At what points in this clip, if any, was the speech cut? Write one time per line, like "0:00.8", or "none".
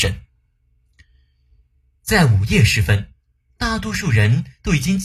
none